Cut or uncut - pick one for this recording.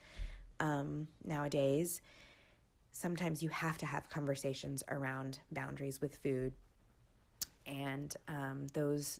uncut